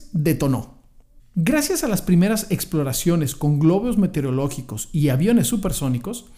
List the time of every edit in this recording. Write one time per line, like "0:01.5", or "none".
0:01.2